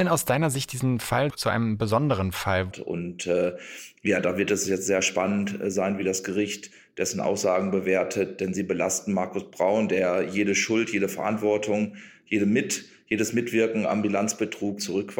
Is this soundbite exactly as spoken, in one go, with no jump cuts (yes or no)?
no